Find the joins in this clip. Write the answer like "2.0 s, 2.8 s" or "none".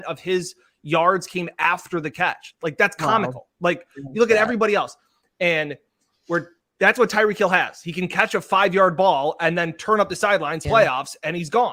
10.7 s